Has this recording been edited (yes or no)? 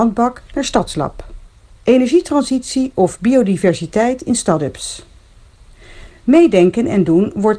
no